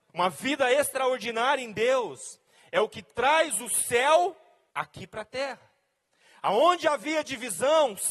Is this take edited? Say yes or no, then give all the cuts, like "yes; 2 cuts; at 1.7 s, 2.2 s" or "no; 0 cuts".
no; 0 cuts